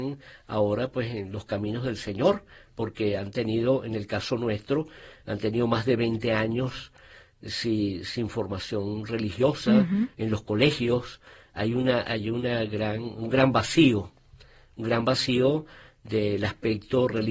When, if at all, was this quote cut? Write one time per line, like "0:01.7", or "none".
none